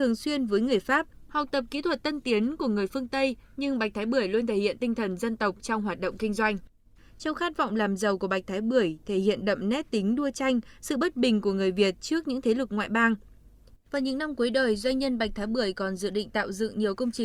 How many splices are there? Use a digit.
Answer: 2